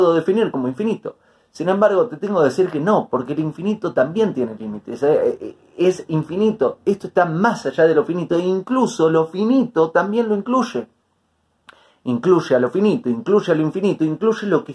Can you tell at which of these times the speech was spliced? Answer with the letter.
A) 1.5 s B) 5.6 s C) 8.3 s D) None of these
D